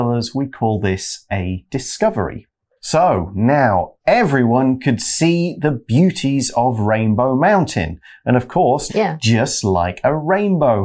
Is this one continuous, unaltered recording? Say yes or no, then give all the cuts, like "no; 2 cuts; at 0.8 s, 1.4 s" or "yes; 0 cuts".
no; 2 cuts; at 2.8 s, 8.9 s